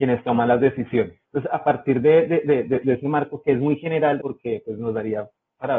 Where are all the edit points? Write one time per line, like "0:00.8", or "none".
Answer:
0:01.2
0:04.2

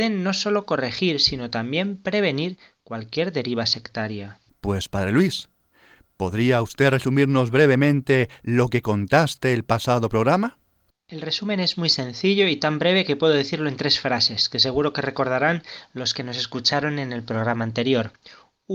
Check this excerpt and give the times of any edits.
0:04.5

